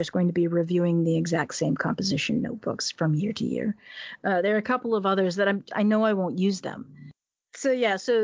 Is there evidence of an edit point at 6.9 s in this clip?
no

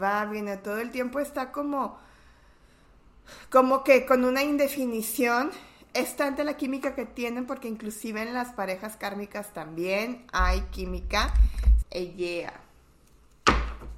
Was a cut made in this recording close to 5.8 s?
no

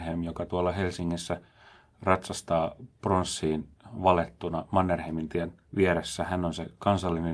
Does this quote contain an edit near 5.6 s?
yes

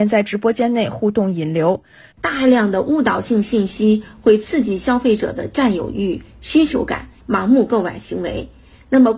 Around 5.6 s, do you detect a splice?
no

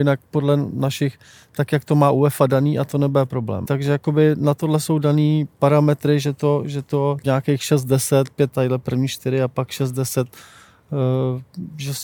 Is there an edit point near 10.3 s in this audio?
no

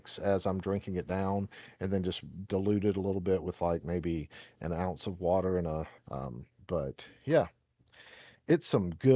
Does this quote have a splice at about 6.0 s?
yes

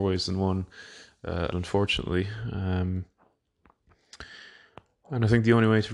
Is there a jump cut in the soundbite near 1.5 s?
yes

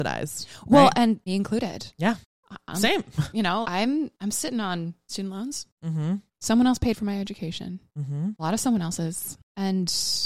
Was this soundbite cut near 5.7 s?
no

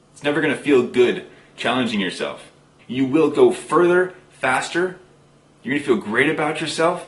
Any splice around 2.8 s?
yes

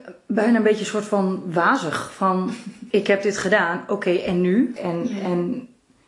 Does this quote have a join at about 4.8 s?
yes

